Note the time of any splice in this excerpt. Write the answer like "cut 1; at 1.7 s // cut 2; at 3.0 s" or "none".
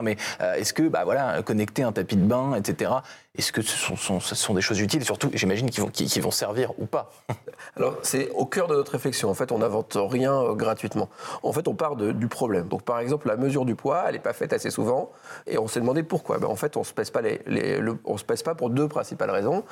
cut 1; at 12.7 s // cut 2; at 15.5 s